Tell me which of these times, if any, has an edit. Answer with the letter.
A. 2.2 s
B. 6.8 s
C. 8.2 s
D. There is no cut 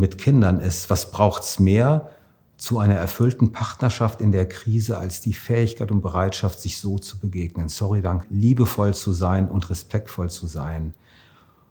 C